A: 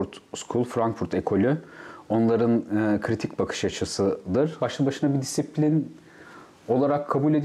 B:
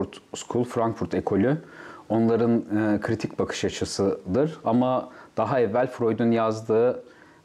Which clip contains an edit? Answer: A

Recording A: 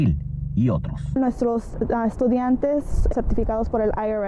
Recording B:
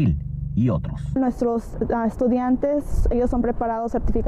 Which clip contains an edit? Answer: A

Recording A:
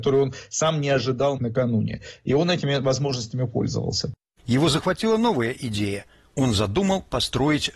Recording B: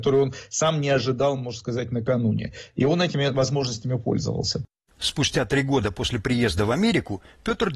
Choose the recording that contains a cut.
A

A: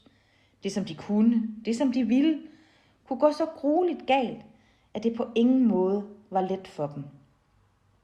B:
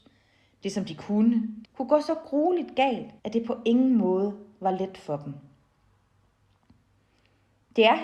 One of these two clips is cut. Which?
B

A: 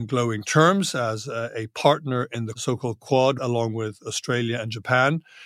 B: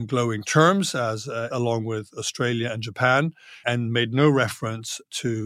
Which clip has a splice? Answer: B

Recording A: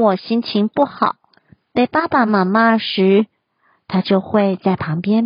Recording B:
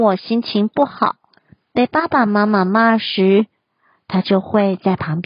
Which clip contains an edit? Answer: A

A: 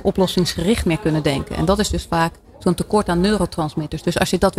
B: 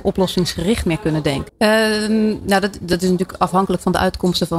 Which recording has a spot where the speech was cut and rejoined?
B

